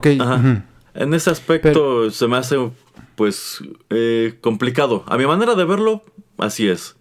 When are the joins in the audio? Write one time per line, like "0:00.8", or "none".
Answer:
none